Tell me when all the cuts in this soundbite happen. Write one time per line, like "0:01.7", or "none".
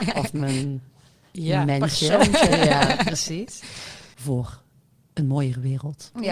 0:04.1